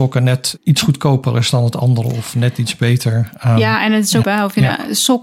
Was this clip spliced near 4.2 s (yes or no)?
yes